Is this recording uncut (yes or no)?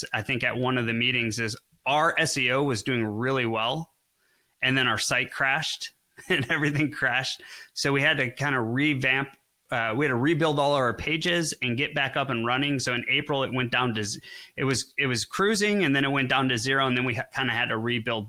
yes